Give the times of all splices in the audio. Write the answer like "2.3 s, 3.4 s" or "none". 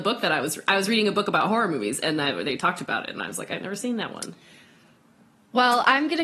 none